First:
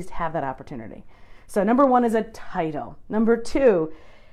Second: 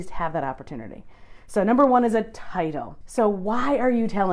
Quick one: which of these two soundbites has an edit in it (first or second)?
second